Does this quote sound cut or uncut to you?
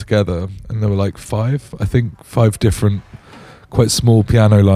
uncut